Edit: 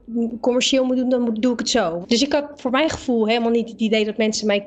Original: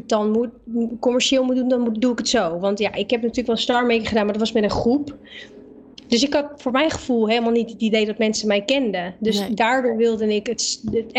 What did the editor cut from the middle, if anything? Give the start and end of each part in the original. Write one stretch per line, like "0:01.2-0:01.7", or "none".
0:02.6-0:06.0